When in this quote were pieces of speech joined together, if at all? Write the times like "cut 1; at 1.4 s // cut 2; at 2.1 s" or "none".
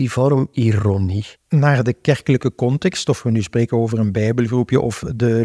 cut 1; at 1.4 s